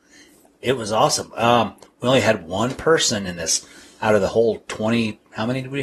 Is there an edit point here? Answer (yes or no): no